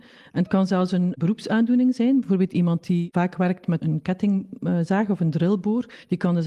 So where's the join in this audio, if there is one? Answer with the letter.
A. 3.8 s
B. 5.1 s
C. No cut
A